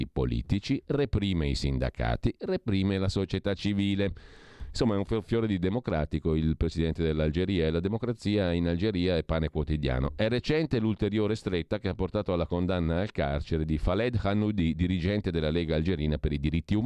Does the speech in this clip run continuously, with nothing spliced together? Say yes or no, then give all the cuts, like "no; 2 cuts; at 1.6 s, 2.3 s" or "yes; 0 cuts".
yes; 0 cuts